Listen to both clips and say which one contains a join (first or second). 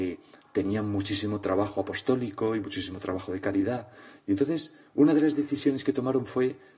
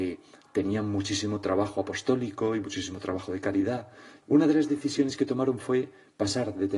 second